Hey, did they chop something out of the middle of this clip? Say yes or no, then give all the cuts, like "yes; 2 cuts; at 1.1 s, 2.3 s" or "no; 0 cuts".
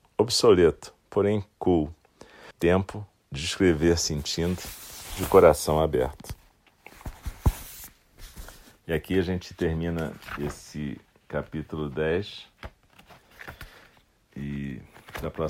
yes; 1 cut; at 2.5 s